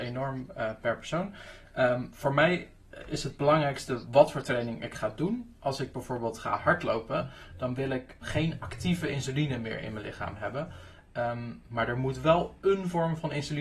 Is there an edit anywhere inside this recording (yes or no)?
yes